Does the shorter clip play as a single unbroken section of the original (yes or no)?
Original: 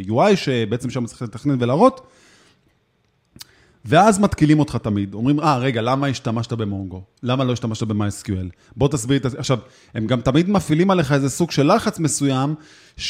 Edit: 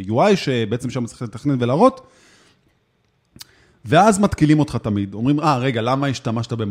yes